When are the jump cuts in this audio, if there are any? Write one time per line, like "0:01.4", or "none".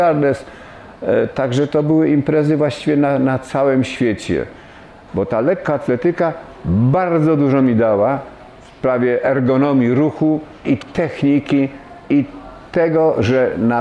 0:05.1
0:10.6